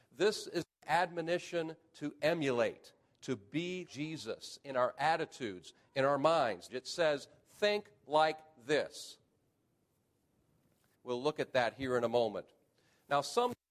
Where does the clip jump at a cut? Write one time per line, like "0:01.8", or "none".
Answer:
0:03.9
0:06.7
0:10.9